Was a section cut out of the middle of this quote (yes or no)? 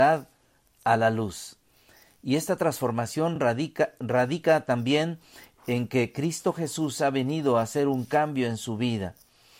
no